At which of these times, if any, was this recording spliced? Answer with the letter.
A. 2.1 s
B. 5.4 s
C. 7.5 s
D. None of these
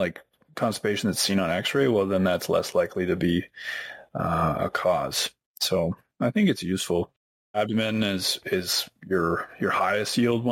C